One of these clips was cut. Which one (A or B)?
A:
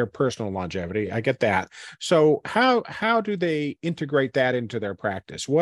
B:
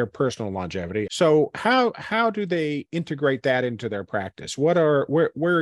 B